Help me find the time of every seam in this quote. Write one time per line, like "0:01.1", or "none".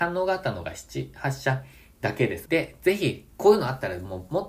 0:02.5